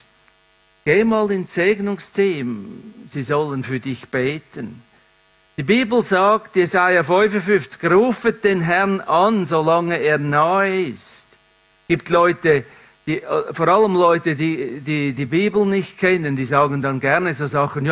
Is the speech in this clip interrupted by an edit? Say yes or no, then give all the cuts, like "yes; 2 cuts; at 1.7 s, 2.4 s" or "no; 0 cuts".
no; 0 cuts